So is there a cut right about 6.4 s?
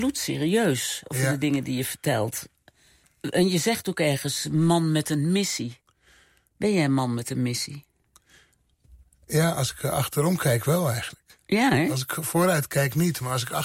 no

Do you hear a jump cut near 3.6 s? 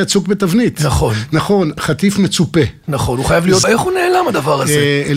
yes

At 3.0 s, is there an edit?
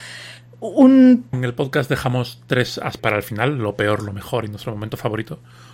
yes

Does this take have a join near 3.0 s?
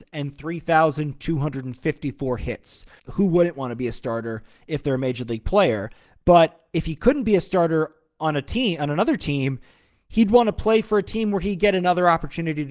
yes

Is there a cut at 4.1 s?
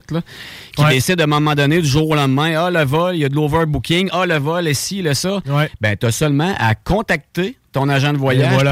no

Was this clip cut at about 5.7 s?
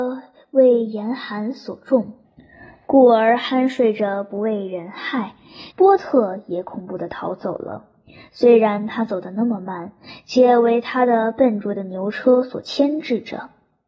yes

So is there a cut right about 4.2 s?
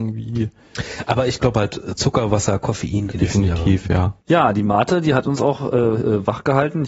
yes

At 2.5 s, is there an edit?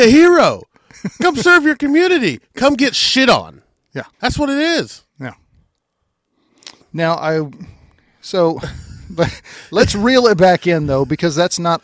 no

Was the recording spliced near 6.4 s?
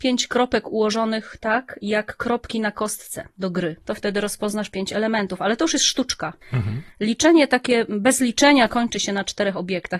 yes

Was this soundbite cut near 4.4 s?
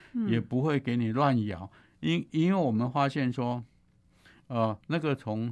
no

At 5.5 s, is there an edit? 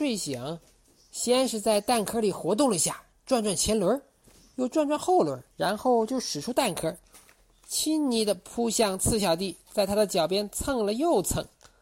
yes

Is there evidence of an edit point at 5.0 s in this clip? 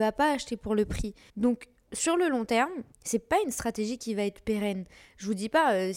no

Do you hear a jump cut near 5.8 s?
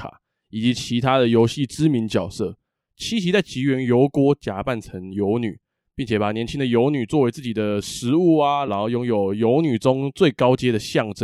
no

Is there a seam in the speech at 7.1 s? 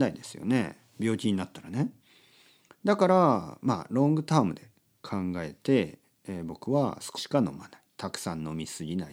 yes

